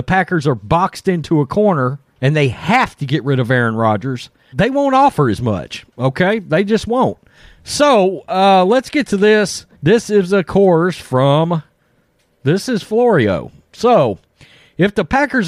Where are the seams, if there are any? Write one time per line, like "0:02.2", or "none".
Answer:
0:02.1
0:04.5
0:09.8